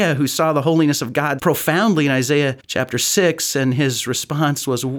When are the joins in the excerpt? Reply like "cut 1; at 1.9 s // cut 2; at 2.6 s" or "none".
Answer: cut 1; at 1.4 s // cut 2; at 2.6 s